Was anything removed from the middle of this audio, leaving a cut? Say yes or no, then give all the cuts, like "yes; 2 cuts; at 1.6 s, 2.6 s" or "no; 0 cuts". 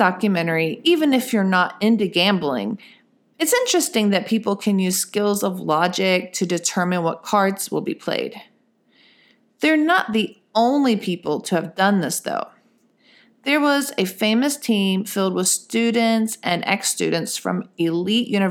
no; 0 cuts